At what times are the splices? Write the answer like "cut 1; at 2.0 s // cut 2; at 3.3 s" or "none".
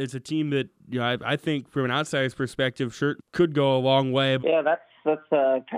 cut 1; at 3.2 s // cut 2; at 4.4 s